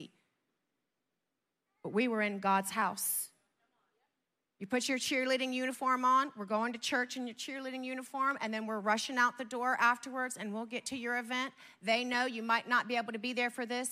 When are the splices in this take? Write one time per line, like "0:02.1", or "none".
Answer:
none

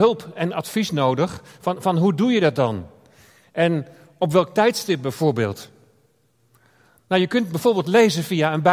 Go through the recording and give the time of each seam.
none

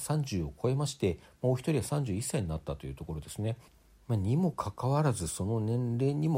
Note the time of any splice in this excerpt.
none

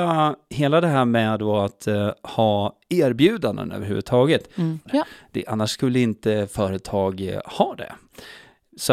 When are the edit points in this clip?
0:04.9

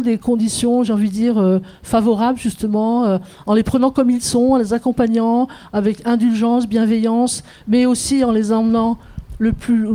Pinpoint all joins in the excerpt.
none

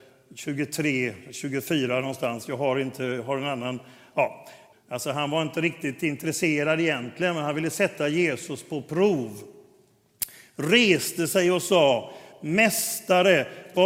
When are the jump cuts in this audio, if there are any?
0:04.7

